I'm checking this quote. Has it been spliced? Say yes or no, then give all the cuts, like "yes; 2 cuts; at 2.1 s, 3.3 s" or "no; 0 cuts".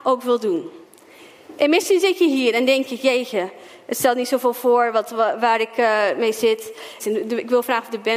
yes; 1 cut; at 7.0 s